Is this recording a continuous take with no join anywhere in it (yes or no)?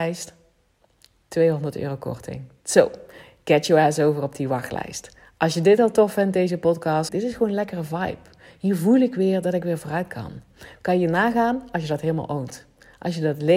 no